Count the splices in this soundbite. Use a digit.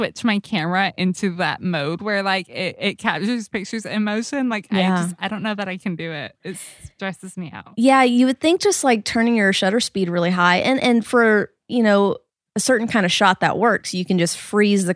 0